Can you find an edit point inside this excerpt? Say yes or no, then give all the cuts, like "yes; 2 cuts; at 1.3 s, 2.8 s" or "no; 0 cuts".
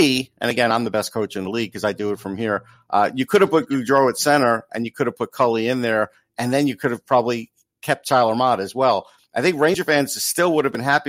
no; 0 cuts